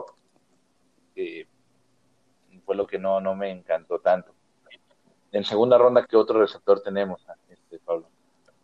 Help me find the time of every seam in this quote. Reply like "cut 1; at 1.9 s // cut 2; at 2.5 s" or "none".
cut 1; at 6.1 s